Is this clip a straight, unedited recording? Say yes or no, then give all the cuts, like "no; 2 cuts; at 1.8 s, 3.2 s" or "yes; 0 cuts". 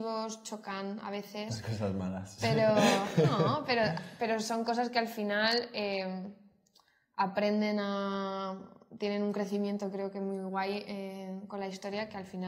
yes; 0 cuts